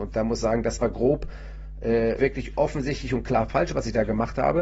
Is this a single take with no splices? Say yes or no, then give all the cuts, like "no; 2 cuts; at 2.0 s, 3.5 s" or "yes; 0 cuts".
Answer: no; 1 cut; at 2.2 s